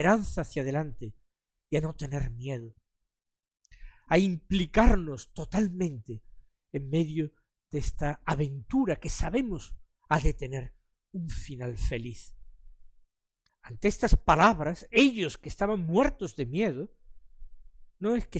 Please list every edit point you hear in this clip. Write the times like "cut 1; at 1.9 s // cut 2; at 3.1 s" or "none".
cut 1; at 13.5 s